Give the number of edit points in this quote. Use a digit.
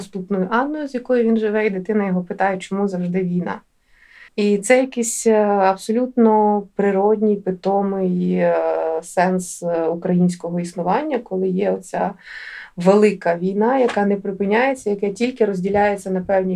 1